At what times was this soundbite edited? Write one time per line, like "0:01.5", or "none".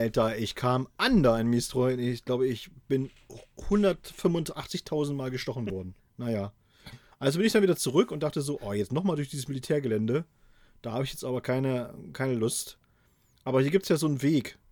0:06.0